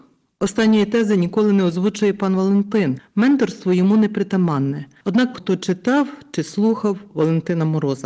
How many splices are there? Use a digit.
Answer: 1